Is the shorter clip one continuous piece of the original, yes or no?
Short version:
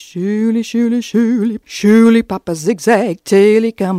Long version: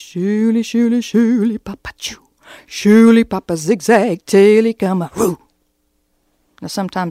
no